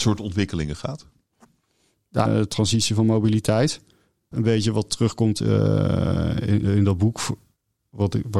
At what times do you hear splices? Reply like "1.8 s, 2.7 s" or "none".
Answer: 2.3 s, 4.3 s, 6.6 s